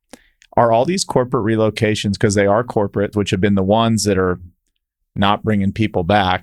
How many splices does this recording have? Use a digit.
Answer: 1